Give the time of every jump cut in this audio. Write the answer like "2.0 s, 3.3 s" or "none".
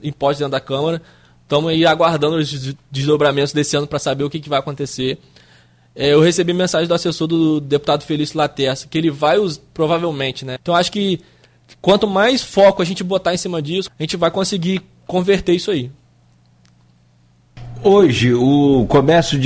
10.6 s, 13.9 s